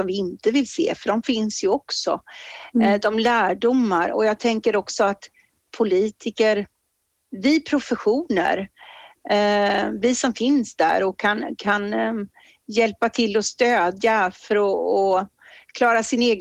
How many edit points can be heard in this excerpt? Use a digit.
1